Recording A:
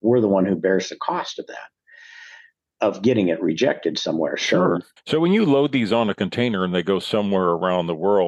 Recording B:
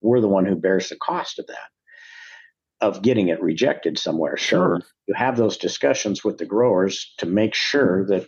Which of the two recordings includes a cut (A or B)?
A